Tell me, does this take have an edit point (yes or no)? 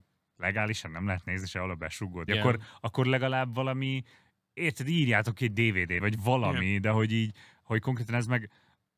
yes